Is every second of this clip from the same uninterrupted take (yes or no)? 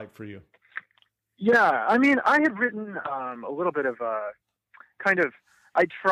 yes